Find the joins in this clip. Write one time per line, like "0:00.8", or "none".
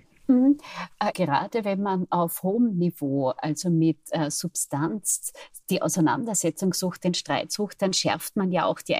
0:01.1